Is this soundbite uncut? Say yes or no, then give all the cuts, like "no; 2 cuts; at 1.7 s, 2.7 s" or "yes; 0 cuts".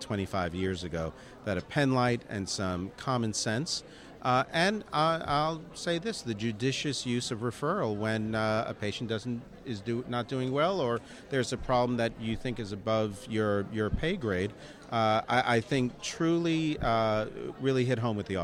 yes; 0 cuts